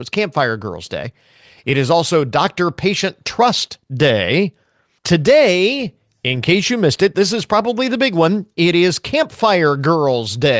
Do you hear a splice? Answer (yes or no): yes